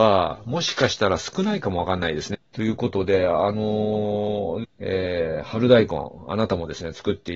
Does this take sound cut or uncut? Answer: cut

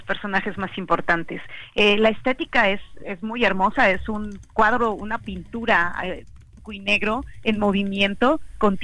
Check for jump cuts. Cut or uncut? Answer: uncut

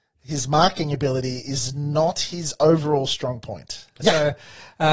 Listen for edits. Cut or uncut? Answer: cut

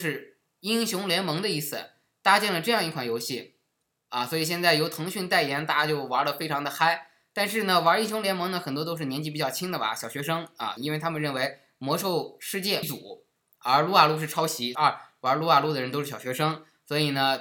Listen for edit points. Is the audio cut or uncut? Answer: cut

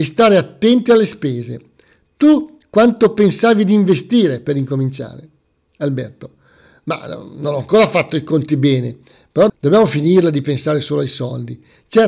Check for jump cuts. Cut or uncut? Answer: cut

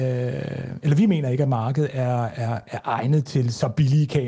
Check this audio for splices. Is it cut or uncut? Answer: uncut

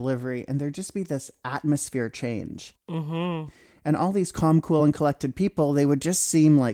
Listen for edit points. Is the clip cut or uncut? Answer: uncut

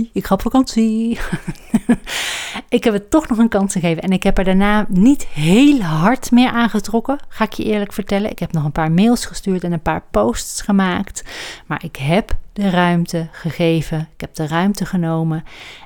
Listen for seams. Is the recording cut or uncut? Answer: uncut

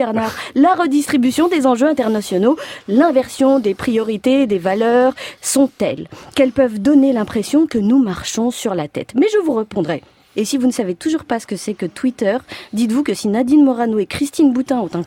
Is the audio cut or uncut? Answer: cut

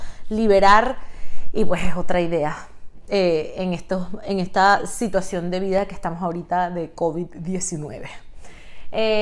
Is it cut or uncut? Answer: uncut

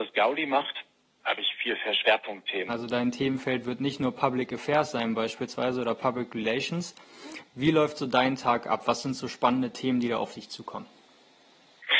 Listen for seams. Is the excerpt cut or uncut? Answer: cut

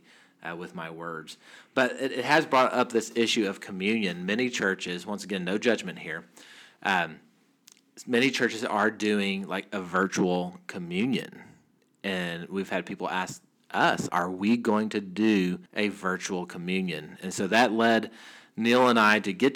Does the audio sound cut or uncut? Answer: cut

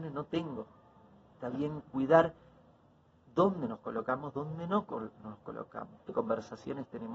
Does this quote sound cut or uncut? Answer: cut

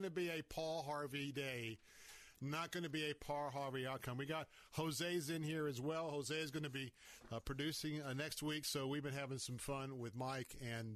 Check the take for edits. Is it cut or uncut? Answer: uncut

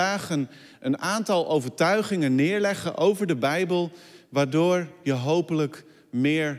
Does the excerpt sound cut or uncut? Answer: uncut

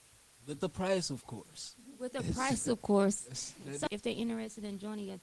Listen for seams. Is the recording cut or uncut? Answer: cut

